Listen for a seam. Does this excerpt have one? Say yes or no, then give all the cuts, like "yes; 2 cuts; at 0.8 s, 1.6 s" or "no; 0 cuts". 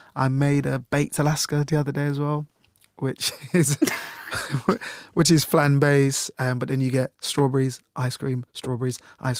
no; 0 cuts